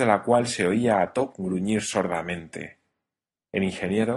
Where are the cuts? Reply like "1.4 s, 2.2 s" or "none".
none